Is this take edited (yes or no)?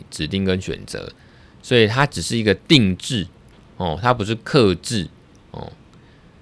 no